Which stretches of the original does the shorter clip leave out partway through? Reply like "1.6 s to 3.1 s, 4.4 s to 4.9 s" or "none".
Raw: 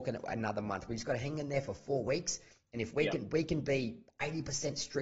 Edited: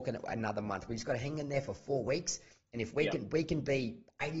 none